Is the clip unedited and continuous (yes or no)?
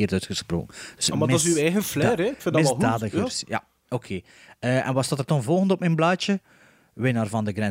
yes